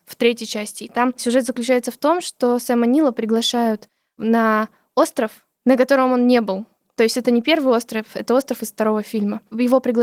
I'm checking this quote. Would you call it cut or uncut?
uncut